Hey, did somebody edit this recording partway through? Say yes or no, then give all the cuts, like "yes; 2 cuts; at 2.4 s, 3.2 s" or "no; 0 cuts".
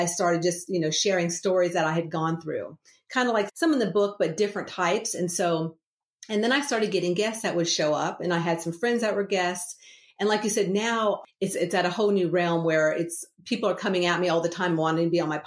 yes; 1 cut; at 3.5 s